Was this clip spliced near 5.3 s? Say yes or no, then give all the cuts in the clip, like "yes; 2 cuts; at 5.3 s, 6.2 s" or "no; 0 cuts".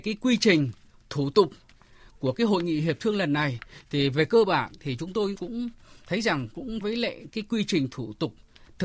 yes; 2 cuts; at 5.3 s, 6.8 s